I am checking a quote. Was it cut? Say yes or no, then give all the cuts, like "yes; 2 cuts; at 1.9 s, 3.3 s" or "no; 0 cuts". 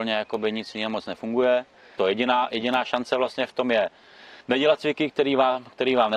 yes; 2 cuts; at 2.0 s, 4.4 s